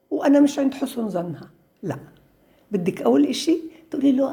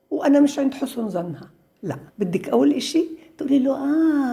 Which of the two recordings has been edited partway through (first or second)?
second